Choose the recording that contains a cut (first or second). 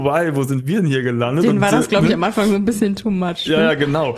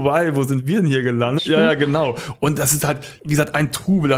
second